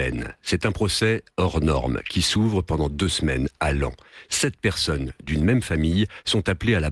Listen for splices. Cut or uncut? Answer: uncut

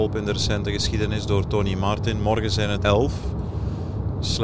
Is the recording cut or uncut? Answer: cut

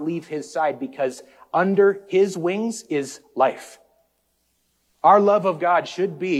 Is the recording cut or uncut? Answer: cut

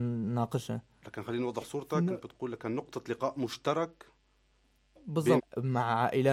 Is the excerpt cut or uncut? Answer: cut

